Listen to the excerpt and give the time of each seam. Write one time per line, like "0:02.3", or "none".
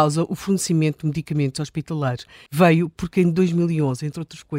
0:02.5